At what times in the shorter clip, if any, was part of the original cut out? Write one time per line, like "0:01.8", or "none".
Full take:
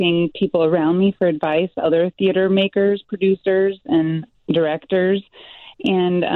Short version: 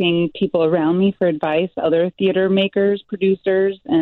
none